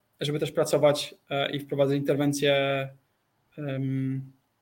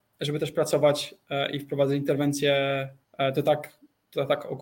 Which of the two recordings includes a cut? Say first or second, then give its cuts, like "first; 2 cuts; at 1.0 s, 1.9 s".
second; 1 cut; at 3.0 s